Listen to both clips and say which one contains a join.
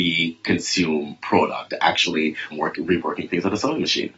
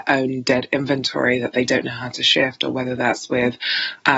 first; 1 cut; at 2.5 s

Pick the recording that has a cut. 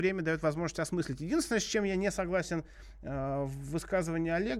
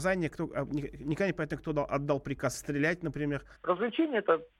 second; 1 cut; at 3.5 s

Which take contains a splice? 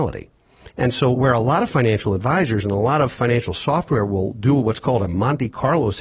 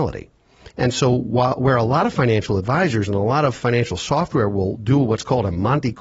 first; 1 cut; at 1.1 s

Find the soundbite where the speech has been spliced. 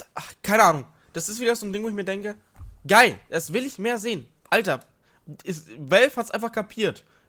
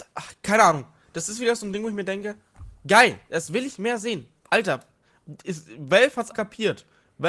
second; 1 cut; at 6.3 s

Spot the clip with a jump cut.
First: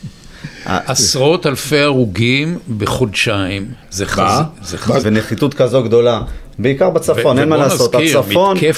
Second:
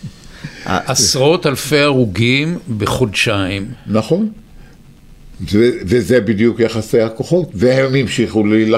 first; 2 cuts; at 3.8 s, 5.0 s

